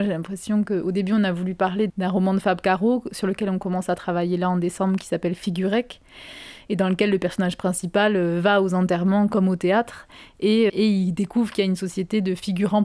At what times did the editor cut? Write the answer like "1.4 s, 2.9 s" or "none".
1.9 s, 10.7 s